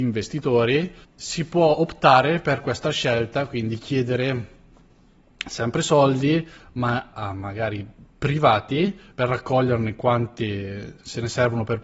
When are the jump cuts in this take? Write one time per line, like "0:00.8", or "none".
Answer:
0:07.1
0:09.1